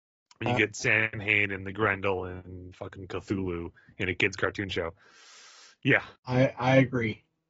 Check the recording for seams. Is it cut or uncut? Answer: cut